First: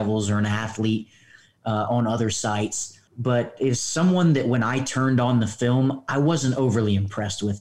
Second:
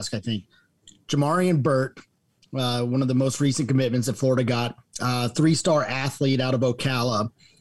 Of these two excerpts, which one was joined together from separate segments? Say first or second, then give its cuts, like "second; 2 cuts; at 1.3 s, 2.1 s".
first; 1 cut; at 3.1 s